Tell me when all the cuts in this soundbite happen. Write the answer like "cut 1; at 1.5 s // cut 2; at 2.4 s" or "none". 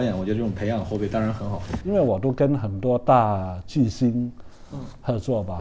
cut 1; at 1.8 s